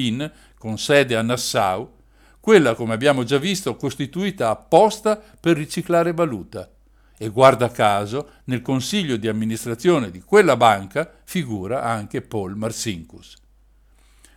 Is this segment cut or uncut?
uncut